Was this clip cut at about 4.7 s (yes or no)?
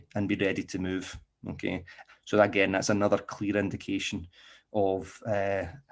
no